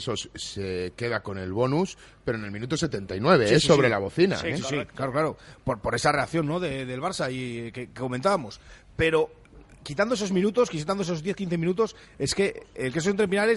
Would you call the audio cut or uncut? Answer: uncut